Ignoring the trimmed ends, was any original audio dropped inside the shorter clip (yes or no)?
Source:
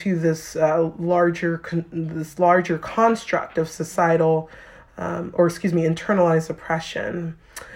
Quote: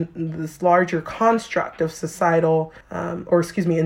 yes